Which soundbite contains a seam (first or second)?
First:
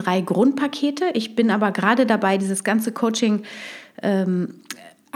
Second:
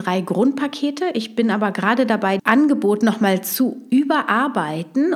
second